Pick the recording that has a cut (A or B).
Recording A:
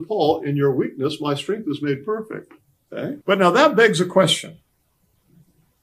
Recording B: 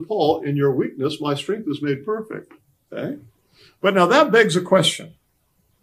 A